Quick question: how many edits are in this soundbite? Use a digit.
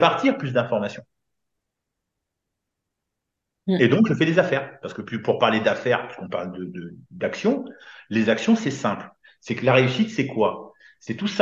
0